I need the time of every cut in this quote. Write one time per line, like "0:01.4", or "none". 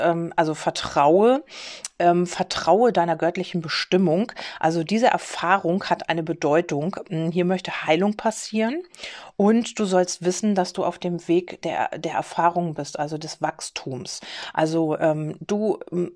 0:14.5